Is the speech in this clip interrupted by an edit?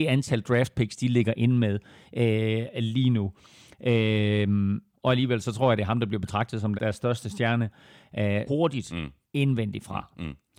yes; 3 cuts; at 4.9 s, 6.7 s, 8.5 s

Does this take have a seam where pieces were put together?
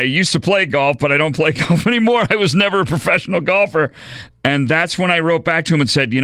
no; 0 cuts

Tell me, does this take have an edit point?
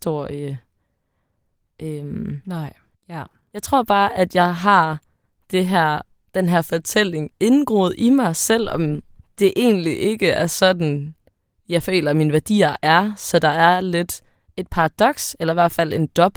yes; 1 cut; at 2.9 s

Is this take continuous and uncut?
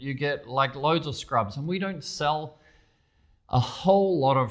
yes; 0 cuts

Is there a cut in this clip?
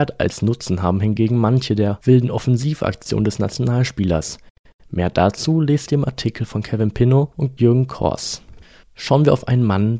no; 0 cuts

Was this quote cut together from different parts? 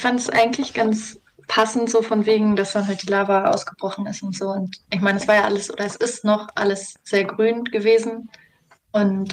no; 0 cuts

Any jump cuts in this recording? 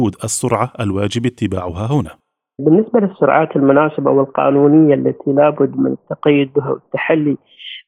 no; 0 cuts

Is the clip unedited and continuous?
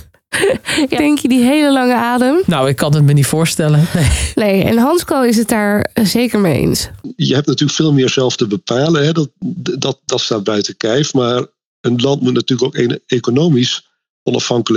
no; 1 cut; at 1.0 s

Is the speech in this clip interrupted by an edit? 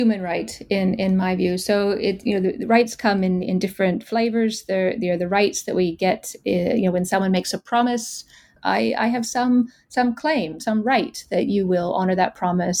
yes; 2 cuts; at 8.6 s, 10.6 s

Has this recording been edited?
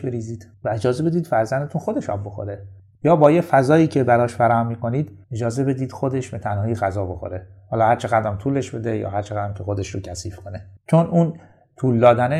yes; 1 cut; at 5.2 s

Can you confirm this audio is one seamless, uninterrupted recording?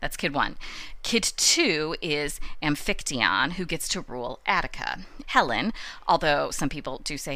no; 1 cut; at 5.2 s

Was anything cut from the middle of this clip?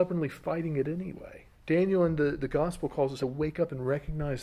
yes; 2 cuts; at 1.5 s, 3.2 s

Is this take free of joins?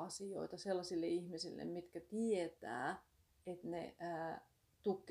yes; 0 cuts

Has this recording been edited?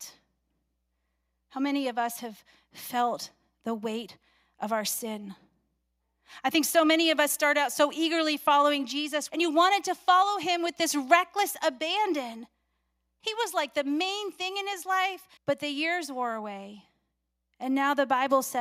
yes; 3 cuts; at 9.3 s, 13.2 s, 15.4 s

